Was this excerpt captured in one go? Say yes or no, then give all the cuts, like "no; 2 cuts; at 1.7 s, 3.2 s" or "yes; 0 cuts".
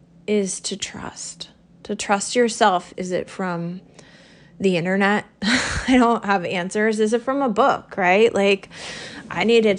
no; 1 cut; at 2.9 s